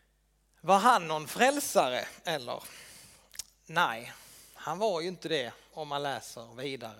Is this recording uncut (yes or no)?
yes